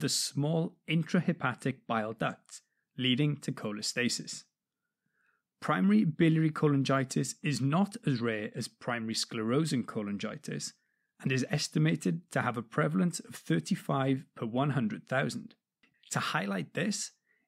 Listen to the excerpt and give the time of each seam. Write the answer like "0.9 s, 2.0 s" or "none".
15.9 s